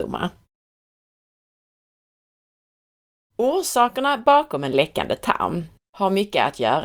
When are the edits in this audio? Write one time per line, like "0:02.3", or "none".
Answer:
0:05.8

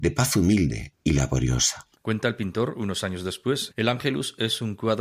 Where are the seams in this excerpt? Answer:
0:01.9
0:03.7

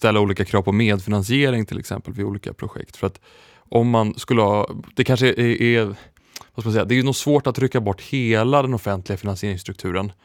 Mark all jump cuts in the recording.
none

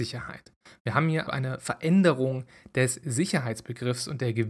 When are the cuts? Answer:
0:01.3

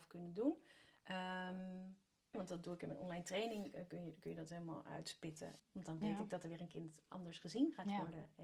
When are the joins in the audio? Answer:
0:02.3
0:05.6

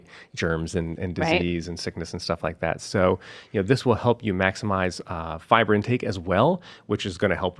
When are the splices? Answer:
none

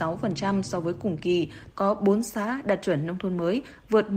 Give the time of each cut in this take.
0:01.7

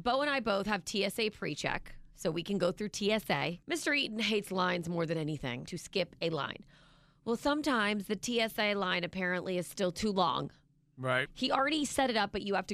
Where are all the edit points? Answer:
0:03.6
0:05.7
0:11.3

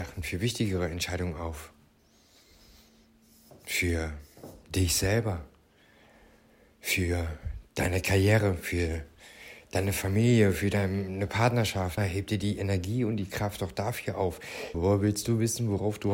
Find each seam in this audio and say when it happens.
0:12.0
0:14.7

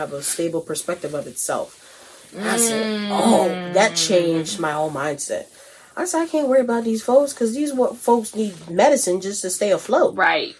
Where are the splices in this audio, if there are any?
none

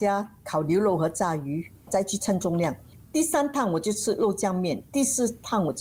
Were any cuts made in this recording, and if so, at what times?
none

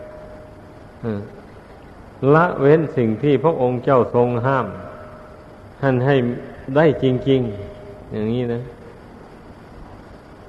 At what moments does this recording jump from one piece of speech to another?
0:05.7

